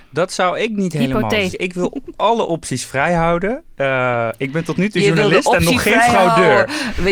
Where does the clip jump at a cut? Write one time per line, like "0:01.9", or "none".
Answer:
0:01.5